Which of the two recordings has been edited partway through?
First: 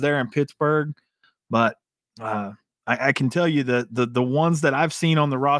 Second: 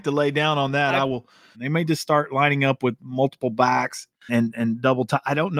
second; 2 cuts; at 1.5 s, 4.3 s

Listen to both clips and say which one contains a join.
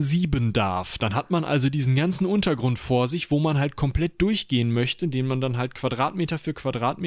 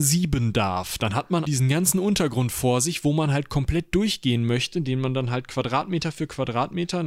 second; 1 cut; at 1.5 s

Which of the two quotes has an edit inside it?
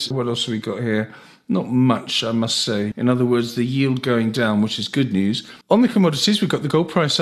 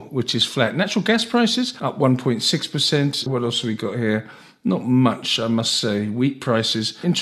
first; 2 cuts; at 2.9 s, 5.6 s

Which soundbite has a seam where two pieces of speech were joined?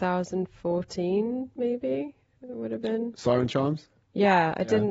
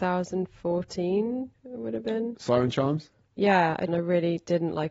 second; 2 cuts; at 1.5 s, 3.9 s

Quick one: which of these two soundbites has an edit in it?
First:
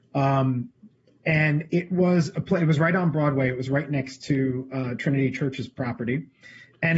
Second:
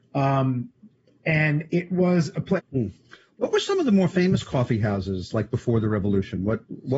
second; 1 cut; at 2.6 s

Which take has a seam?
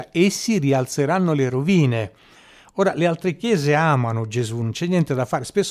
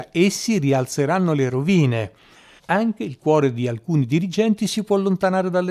second; 1 cut; at 2.6 s

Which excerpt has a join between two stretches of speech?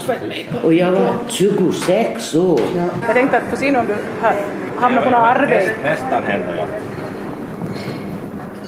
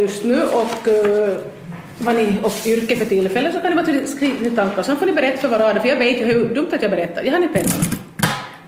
first; 1 cut; at 3.0 s

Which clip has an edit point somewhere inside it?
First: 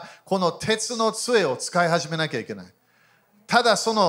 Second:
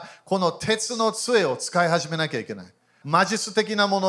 second; 1 cut; at 3.0 s

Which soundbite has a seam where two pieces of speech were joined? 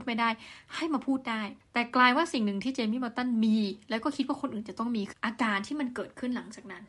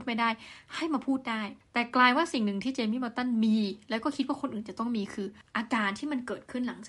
first; 1 cut; at 5.1 s

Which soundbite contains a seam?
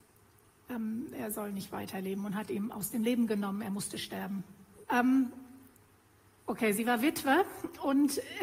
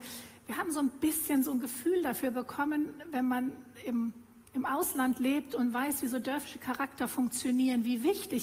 first; 1 cut; at 4.8 s

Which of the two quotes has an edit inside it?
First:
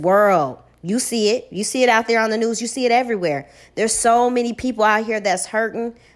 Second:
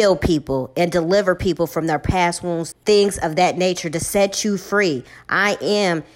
second; 1 cut; at 2.7 s

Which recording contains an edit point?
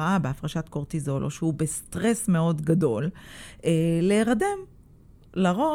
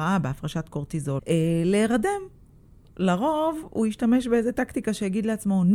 second; 1 cut; at 1.2 s

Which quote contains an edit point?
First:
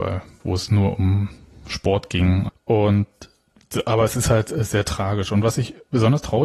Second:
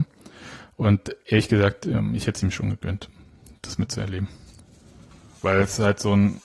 first; 1 cut; at 2.5 s

